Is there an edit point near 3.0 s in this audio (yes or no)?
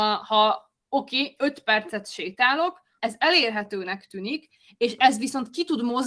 yes